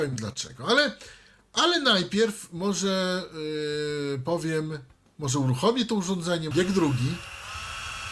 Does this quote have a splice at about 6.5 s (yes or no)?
yes